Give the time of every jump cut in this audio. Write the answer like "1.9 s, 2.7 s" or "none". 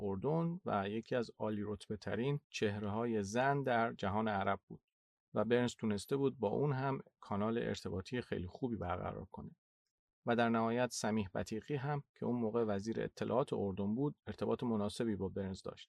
none